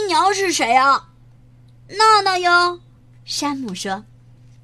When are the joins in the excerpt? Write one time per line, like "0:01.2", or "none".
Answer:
none